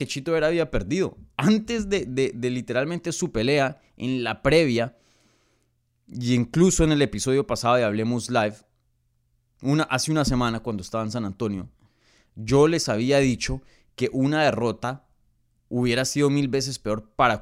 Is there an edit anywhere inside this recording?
no; 0 cuts

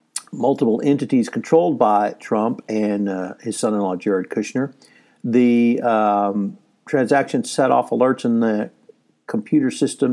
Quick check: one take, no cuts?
yes; 0 cuts

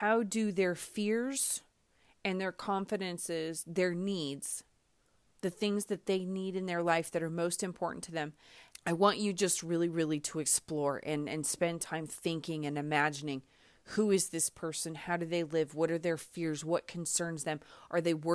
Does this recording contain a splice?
yes; 1 cut; at 8.7 s

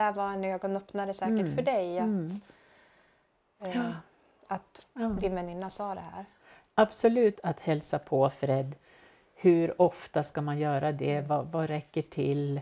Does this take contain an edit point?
yes; 1 cut; at 7.4 s

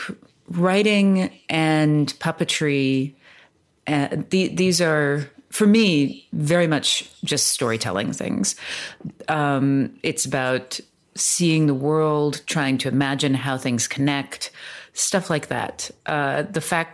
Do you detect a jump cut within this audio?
no; 0 cuts

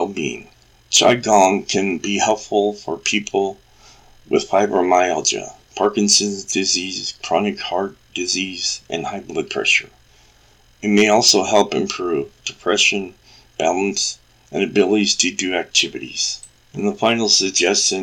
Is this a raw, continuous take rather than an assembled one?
yes; 0 cuts

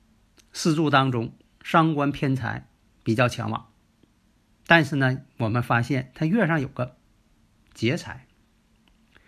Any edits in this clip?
no; 0 cuts

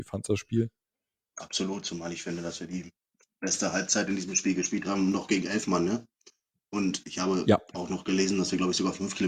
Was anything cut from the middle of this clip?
no; 0 cuts

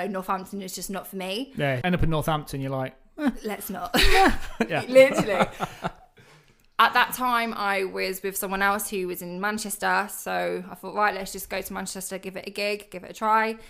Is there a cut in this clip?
yes; 1 cut; at 1.8 s

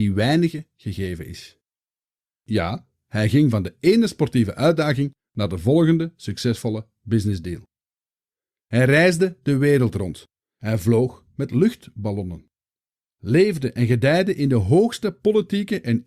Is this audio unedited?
yes; 0 cuts

